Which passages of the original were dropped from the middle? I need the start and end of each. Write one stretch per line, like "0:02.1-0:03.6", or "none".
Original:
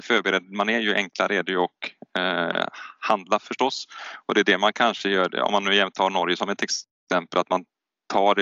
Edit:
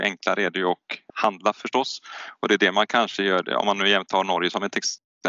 0:02.0-0:03.0